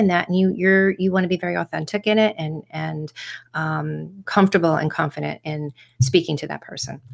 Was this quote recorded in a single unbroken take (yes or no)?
no